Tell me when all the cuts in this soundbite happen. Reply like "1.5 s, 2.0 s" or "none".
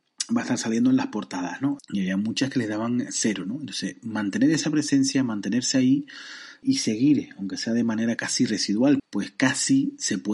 1.8 s, 6.6 s, 9.0 s